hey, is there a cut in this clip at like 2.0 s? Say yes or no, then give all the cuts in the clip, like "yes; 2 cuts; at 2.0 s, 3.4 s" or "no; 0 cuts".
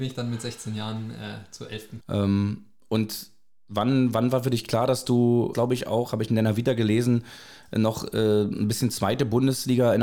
yes; 2 cuts; at 2.0 s, 5.5 s